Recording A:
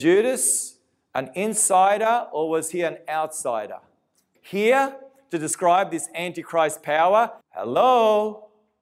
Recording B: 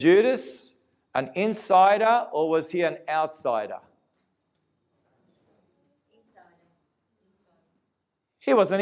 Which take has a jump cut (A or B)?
A